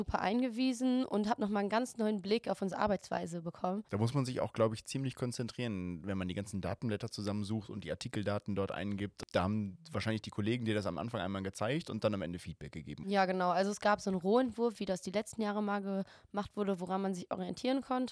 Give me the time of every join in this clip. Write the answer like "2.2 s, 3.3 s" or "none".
3.9 s

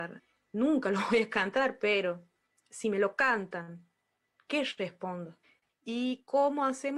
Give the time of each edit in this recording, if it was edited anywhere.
5.7 s

